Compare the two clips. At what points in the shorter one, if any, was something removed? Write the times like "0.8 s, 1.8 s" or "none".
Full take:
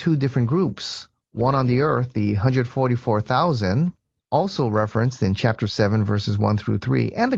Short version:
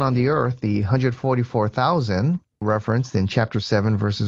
2.6 s